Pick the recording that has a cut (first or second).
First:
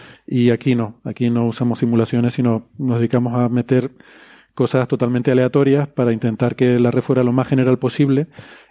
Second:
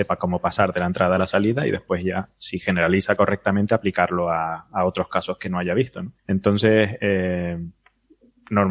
second